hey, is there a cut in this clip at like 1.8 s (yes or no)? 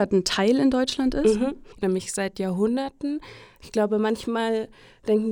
yes